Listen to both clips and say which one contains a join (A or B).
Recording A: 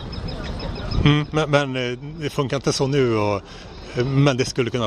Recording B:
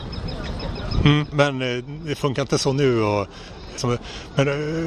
B